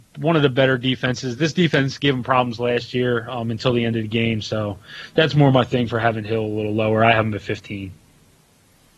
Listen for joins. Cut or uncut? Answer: uncut